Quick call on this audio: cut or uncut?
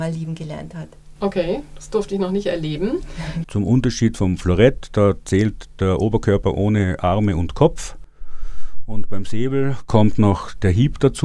cut